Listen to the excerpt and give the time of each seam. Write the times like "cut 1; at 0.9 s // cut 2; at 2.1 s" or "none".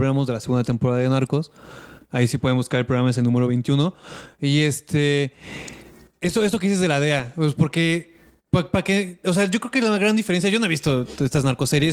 none

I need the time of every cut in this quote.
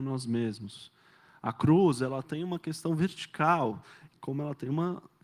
none

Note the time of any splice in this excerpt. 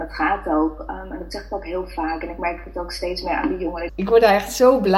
cut 1; at 3.9 s

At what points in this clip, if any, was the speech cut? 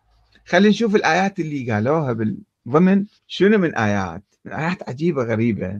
cut 1; at 3.2 s

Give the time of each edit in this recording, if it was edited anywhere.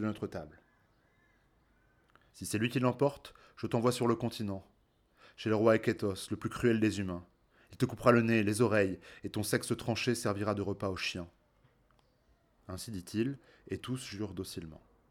cut 1; at 2.3 s // cut 2; at 12.6 s

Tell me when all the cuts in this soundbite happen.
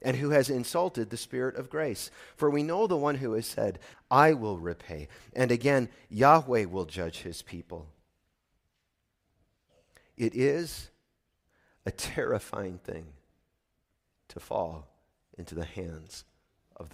cut 1; at 3.9 s

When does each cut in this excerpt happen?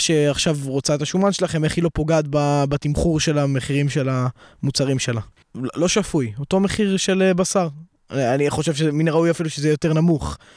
cut 1; at 5.4 s

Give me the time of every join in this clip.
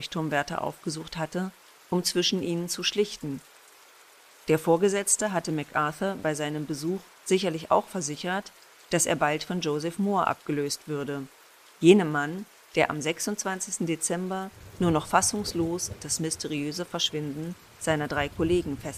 none

